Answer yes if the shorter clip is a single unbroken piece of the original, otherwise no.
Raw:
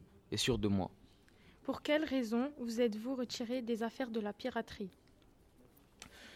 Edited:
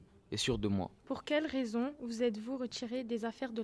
no